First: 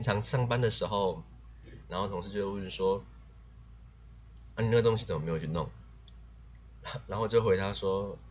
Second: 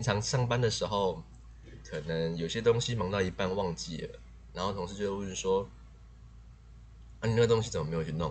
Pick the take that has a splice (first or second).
first